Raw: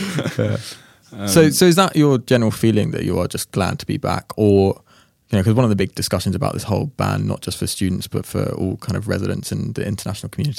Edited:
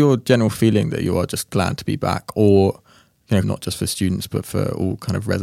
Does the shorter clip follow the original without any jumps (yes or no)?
no